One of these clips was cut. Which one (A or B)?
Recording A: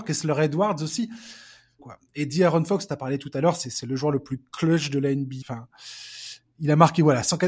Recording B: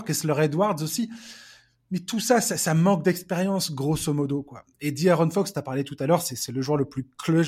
A